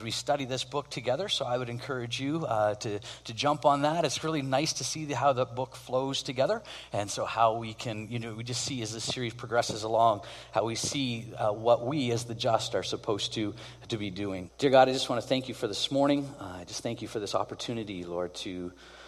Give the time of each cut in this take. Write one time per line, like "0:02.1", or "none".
0:14.5